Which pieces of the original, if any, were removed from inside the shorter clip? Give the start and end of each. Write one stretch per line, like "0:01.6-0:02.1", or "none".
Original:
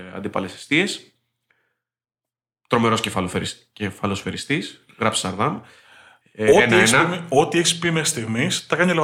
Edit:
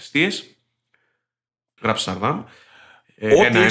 0:02.3-0:04.9